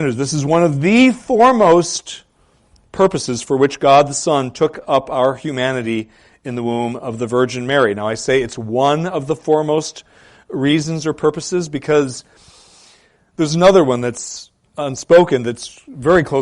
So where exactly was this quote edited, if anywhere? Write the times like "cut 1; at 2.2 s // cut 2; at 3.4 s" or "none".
none